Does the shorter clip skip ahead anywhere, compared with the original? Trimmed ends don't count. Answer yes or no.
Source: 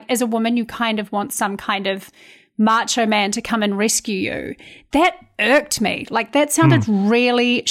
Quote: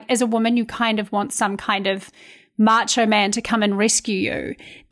no